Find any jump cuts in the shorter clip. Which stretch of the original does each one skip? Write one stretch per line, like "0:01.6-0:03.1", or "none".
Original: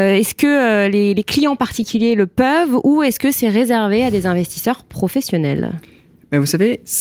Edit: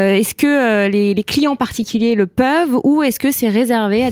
none